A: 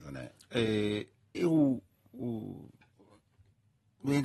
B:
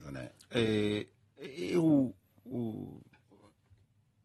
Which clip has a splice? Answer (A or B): A